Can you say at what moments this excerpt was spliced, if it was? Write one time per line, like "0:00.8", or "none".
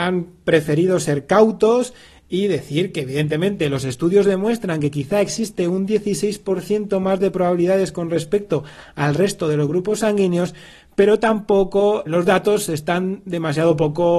0:12.1